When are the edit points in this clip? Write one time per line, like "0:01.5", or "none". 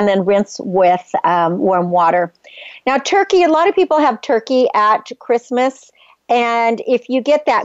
none